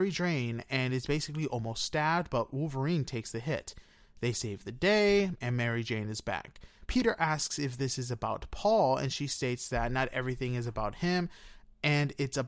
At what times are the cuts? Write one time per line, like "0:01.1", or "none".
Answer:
0:06.9